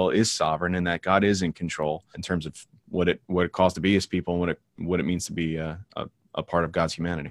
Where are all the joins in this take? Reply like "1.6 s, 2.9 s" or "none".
2.1 s